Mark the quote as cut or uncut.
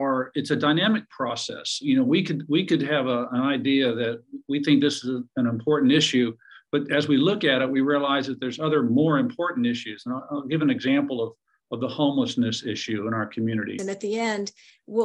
cut